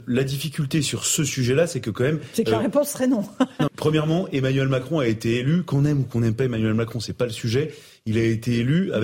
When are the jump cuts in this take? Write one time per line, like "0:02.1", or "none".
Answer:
0:03.7